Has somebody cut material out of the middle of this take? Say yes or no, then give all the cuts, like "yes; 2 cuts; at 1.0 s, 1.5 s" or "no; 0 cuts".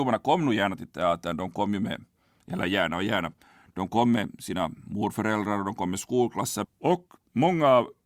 yes; 1 cut; at 6.6 s